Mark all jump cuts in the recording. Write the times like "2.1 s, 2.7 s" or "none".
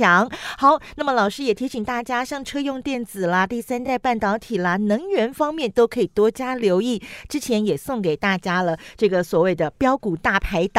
none